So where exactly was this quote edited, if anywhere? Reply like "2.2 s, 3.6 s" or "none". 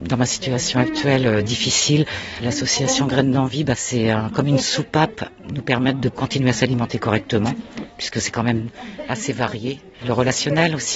none